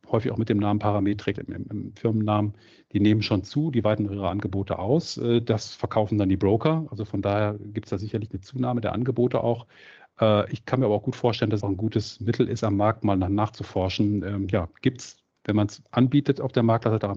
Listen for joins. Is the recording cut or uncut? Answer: cut